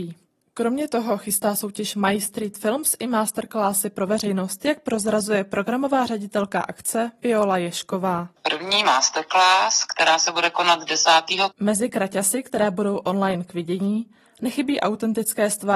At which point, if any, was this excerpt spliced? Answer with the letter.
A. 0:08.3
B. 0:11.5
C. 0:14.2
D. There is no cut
B